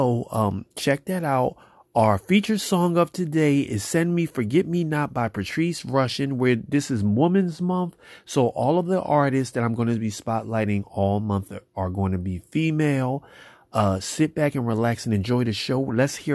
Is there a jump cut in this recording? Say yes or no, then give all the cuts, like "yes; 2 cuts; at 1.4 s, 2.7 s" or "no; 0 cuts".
no; 0 cuts